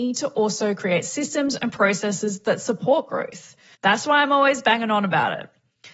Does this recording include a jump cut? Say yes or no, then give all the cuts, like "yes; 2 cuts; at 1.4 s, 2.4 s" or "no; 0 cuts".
yes; 1 cut; at 3.7 s